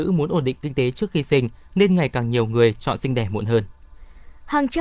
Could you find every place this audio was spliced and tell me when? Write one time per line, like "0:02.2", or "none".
none